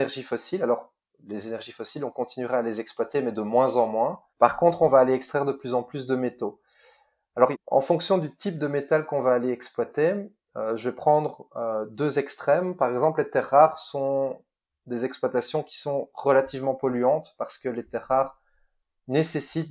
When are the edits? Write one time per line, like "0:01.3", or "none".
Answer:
0:04.3
0:07.5